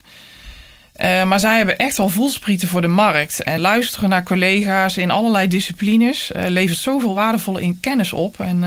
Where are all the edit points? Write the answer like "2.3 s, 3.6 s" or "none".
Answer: 3.6 s

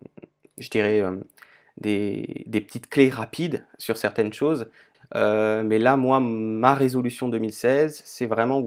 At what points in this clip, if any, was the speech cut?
4.9 s

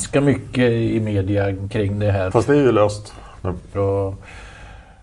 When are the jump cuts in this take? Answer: 2.3 s, 3.7 s

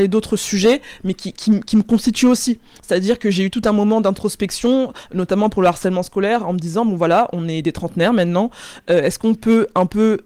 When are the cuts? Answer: none

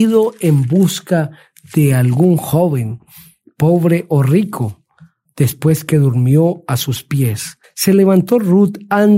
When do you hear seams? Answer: 5.2 s, 7.6 s

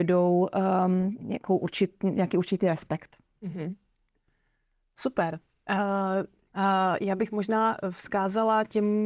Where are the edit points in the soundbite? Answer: 6.5 s

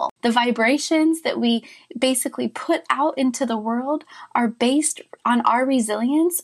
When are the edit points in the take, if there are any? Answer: none

